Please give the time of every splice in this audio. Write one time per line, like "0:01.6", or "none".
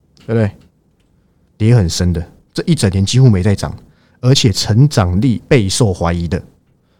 0:01.5